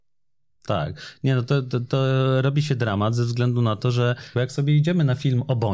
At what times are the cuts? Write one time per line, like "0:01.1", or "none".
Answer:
0:04.3